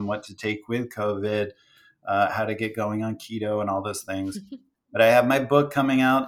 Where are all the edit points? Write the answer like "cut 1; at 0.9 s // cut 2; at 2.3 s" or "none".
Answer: none